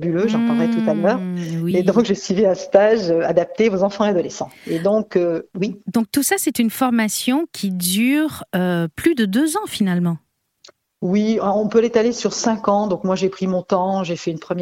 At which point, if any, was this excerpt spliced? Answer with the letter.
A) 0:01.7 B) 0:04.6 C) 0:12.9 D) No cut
D